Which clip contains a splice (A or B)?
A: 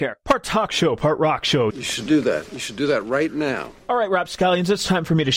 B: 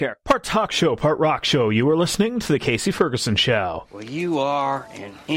A